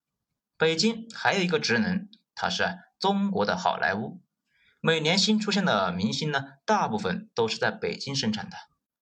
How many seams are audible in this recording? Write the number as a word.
zero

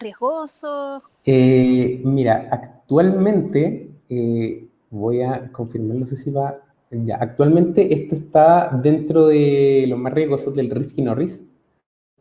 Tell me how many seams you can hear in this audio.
one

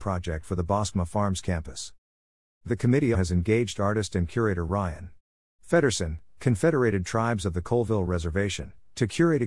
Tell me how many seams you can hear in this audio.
one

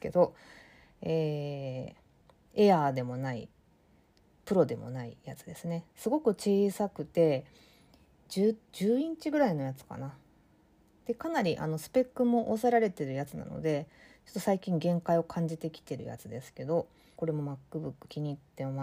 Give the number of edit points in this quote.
one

